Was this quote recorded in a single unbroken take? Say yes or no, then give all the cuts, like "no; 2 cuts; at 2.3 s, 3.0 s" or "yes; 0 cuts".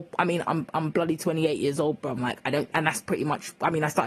no; 1 cut; at 2.2 s